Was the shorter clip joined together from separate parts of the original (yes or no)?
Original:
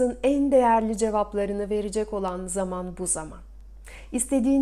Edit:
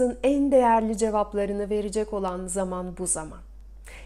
no